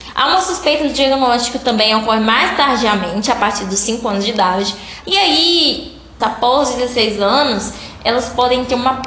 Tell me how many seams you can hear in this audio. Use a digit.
2